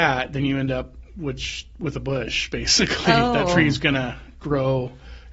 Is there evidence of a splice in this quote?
no; 0 cuts

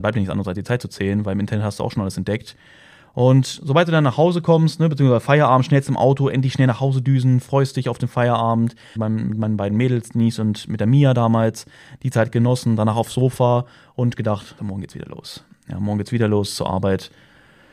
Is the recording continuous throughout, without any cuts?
no; 2 cuts; at 9.0 s, 14.6 s

